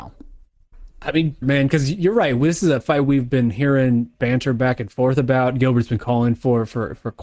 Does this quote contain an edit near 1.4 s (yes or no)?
yes